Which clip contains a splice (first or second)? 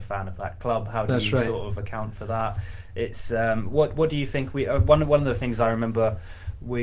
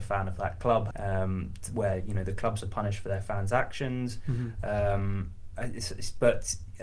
second